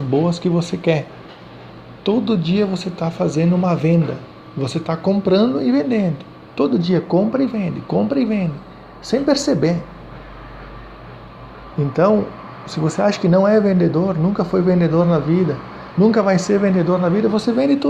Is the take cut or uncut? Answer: uncut